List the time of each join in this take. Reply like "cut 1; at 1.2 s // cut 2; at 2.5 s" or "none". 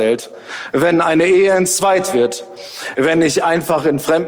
none